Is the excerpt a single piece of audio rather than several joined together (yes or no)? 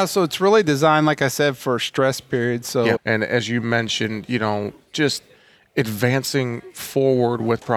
no